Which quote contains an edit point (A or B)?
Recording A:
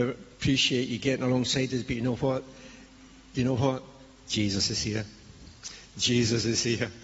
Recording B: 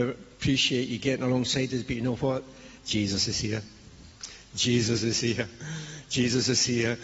B